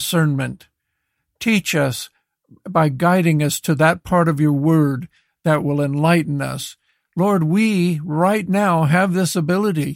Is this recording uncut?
yes; 0 cuts

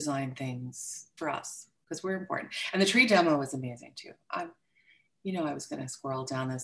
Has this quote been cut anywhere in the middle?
yes; 1 cut; at 1.2 s

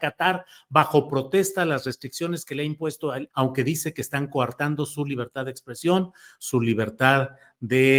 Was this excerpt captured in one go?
no; 1 cut; at 3.3 s

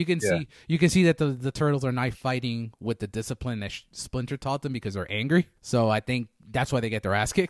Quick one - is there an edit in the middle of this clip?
yes; 1 cut; at 5.6 s

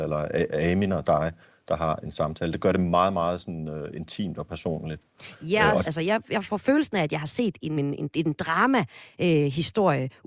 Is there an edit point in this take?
yes; 2 cuts; at 5.8 s, 7.8 s

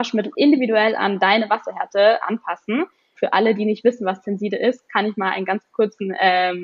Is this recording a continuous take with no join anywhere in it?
no; 1 cut; at 3.2 s

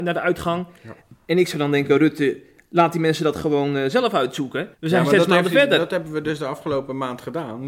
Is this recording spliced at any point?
yes; 1 cut; at 4.7 s

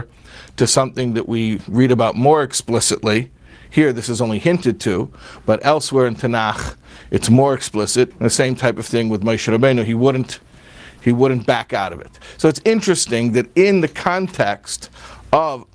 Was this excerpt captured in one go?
no; 1 cut; at 8.1 s

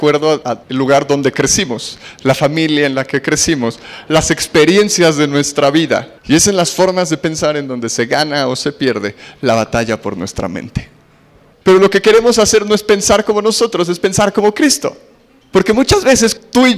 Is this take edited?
yes; 2 cuts; at 6.2 s, 11.5 s

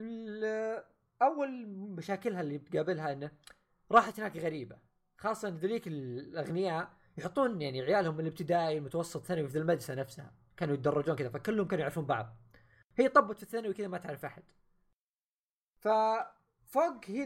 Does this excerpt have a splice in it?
no; 0 cuts

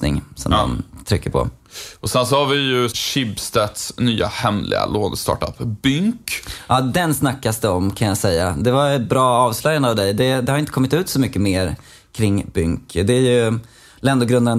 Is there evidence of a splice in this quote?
yes; 1 cut; at 2.9 s

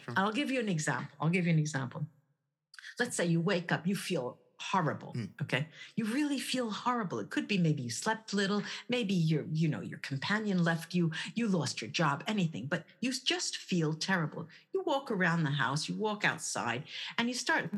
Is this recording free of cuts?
yes; 0 cuts

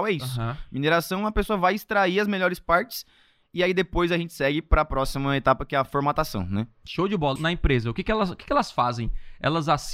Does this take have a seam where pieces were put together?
yes; 1 cut; at 7.4 s

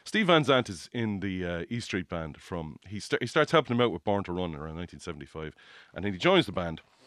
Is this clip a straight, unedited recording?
yes; 0 cuts

